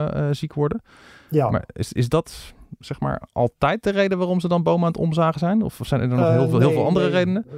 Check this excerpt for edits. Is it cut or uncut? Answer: uncut